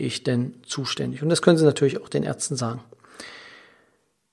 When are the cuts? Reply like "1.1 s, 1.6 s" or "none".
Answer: none